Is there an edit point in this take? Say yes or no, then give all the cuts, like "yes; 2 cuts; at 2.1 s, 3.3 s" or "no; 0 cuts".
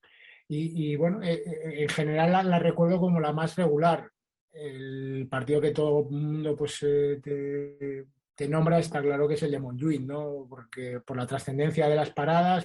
no; 0 cuts